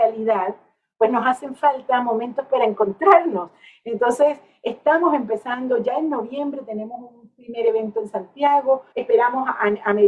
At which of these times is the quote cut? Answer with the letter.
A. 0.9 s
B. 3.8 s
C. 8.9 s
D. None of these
C